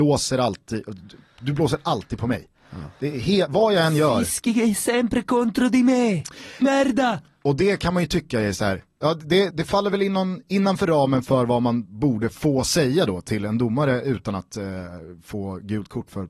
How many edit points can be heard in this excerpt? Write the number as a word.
two